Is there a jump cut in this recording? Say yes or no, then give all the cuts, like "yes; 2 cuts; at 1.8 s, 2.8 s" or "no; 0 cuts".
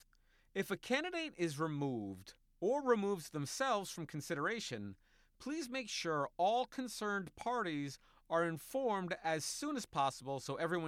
no; 0 cuts